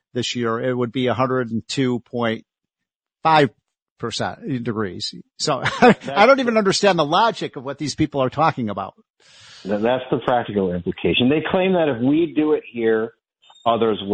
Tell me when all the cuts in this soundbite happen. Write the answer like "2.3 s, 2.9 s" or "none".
none